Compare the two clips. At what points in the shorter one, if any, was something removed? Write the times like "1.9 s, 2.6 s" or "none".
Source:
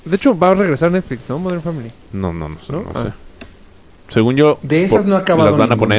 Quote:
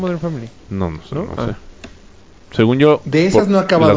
0.9 s